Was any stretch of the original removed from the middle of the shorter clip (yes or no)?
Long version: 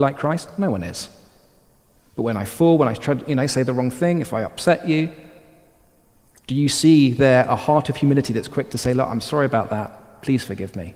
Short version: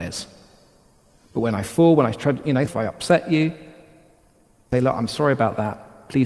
yes